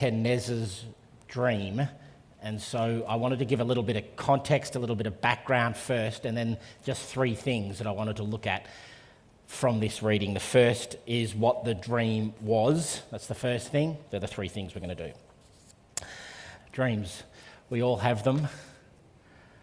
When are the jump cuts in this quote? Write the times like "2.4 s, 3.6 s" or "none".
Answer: 14.0 s, 16.6 s